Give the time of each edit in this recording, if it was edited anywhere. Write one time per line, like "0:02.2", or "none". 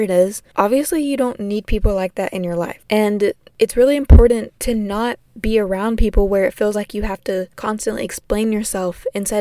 none